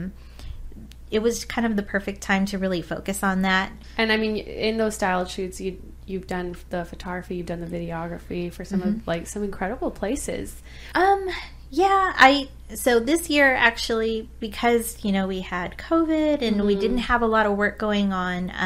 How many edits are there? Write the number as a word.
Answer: one